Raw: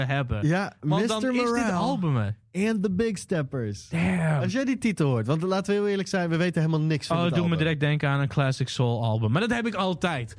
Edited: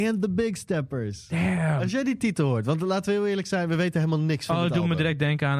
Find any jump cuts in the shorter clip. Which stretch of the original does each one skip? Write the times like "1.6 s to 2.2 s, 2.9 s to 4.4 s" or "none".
none